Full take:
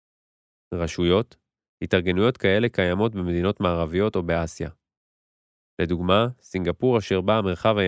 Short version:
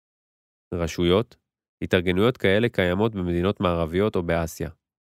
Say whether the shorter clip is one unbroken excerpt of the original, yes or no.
yes